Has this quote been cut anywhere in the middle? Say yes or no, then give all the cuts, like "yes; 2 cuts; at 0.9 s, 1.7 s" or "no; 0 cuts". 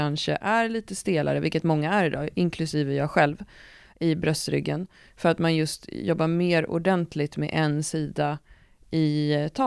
no; 0 cuts